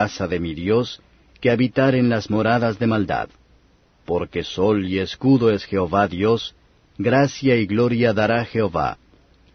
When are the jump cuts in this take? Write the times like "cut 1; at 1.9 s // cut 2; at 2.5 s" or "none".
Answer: none

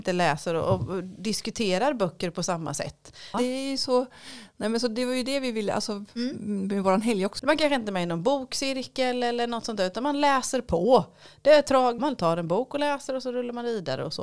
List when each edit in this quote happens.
cut 1; at 3.3 s // cut 2; at 7.4 s // cut 3; at 12.0 s

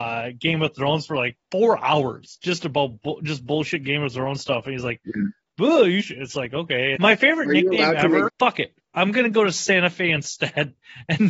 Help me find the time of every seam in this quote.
cut 1; at 1.4 s // cut 2; at 7.0 s // cut 3; at 8.3 s

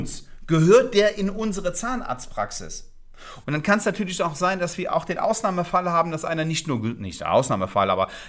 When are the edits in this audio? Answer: cut 1; at 3.4 s

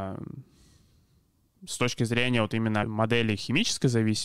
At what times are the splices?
cut 1; at 1.6 s // cut 2; at 2.8 s

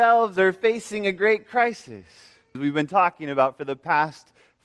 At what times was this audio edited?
cut 1; at 2.5 s

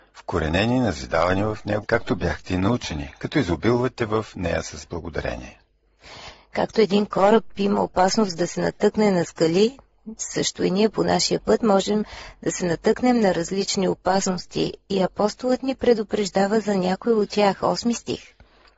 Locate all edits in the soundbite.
cut 1; at 1.8 s

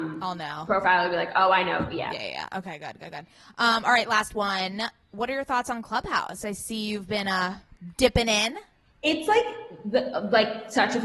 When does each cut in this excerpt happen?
none

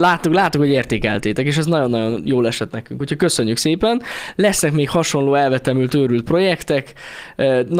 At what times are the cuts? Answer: none

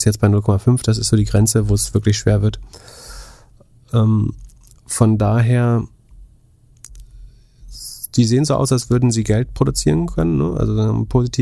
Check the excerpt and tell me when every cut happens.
none

